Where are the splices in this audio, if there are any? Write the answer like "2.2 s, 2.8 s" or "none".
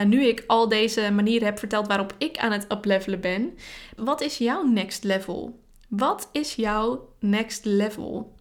4.0 s